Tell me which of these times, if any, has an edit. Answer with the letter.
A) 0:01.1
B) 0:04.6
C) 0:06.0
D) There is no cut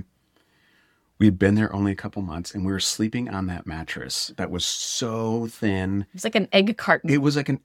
D